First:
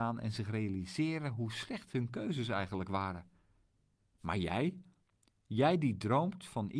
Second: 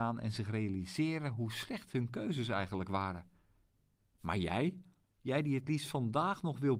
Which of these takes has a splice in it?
second; 1 cut; at 5.0 s

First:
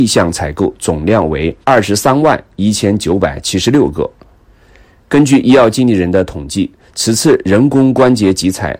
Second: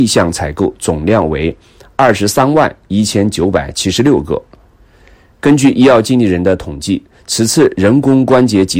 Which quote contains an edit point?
first; 1 cut; at 1.6 s

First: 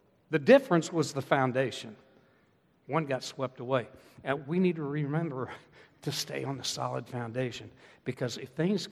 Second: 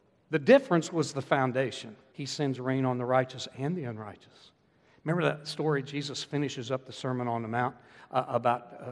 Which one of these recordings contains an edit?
second; 1 cut; at 2.1 s

